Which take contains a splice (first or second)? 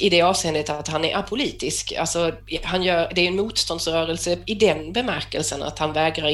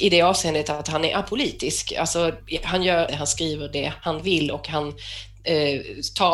second